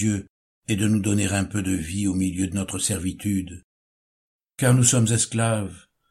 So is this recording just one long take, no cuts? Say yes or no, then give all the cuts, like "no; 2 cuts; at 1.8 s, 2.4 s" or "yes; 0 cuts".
yes; 0 cuts